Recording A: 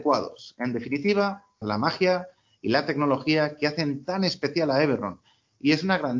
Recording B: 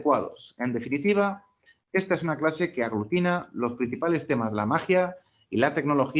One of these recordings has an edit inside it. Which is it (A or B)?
A